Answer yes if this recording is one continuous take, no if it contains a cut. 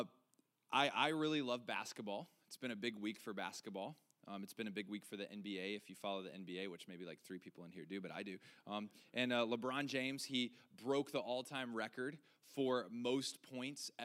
yes